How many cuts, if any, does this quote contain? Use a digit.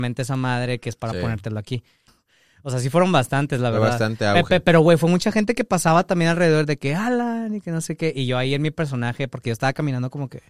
1